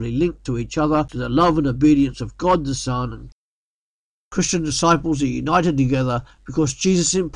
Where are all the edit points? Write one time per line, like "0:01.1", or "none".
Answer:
none